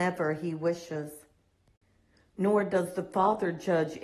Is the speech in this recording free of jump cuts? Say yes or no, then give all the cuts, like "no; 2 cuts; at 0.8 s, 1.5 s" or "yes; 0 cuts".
yes; 0 cuts